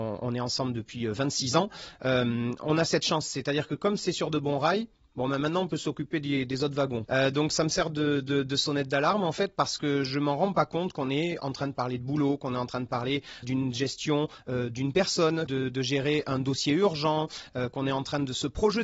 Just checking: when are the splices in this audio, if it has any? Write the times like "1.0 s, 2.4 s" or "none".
7.0 s, 13.4 s, 15.5 s